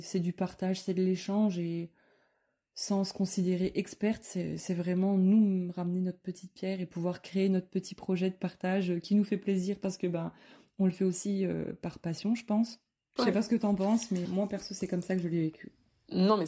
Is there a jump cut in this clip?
yes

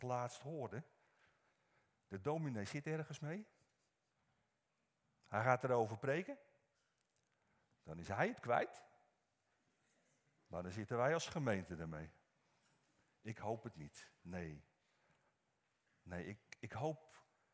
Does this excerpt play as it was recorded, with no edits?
yes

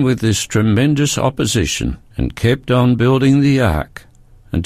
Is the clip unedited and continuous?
no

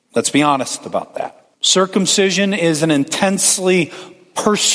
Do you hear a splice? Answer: yes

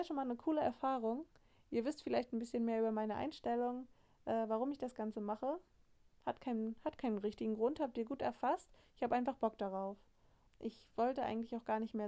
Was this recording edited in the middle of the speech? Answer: yes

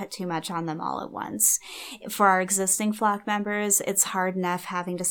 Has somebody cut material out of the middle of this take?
no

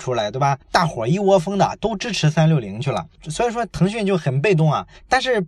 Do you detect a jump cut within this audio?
no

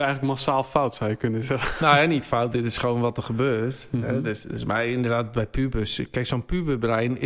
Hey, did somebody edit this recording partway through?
no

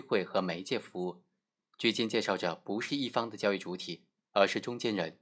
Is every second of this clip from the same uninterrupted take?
yes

